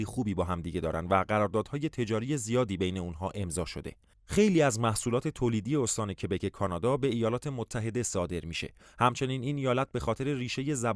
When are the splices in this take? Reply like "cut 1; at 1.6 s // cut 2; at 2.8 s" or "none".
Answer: none